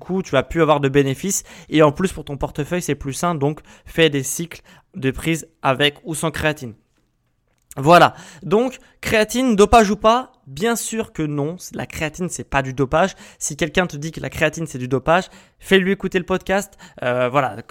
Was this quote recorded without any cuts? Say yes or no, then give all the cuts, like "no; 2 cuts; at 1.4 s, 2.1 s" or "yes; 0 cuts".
yes; 0 cuts